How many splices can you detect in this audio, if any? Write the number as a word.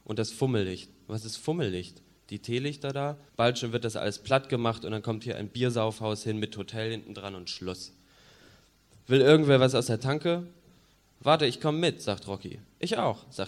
one